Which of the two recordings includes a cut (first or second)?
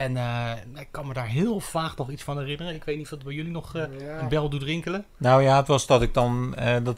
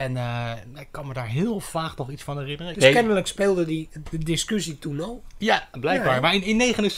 second